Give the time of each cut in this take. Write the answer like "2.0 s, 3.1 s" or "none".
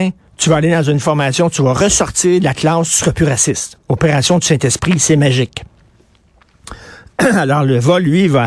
3.8 s

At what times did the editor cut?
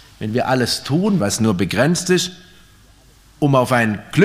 1.2 s

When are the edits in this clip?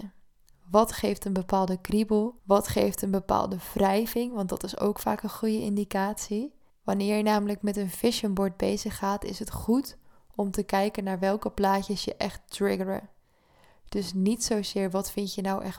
2.4 s, 6.7 s

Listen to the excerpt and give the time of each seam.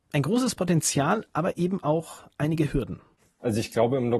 none

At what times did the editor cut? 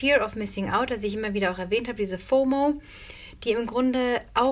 none

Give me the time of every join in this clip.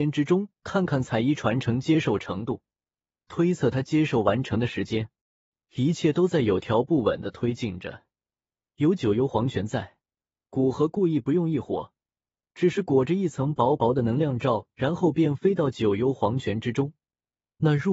none

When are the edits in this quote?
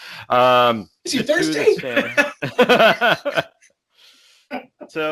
1.1 s

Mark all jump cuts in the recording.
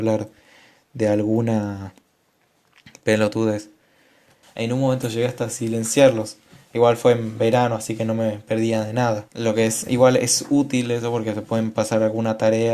4.4 s, 9.3 s

